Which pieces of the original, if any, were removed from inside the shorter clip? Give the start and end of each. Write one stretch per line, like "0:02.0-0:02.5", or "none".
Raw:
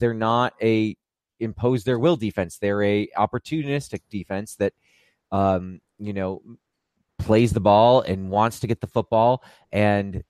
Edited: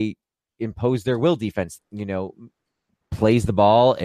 0:02.6-0:05.9